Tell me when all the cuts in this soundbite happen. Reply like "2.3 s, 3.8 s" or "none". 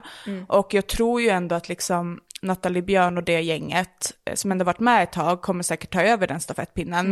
none